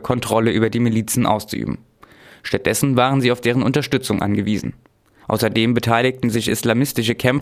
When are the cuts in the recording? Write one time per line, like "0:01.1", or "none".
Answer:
0:05.2